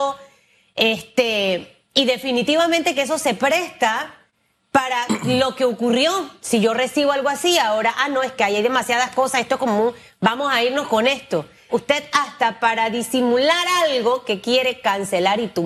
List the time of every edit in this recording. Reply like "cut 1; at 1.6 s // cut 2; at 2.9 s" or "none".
cut 1; at 11.7 s